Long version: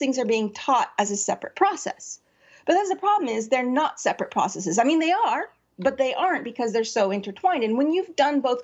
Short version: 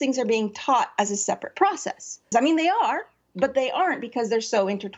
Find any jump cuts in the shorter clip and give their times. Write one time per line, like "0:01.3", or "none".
0:02.3